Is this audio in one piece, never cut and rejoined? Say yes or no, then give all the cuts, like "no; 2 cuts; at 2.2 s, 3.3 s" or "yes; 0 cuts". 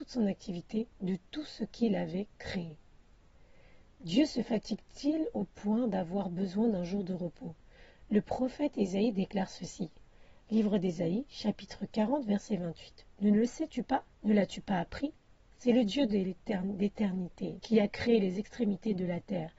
no; 2 cuts; at 14.1 s, 17.6 s